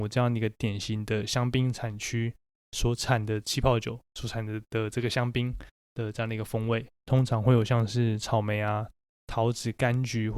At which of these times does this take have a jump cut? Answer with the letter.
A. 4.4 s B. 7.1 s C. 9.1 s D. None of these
B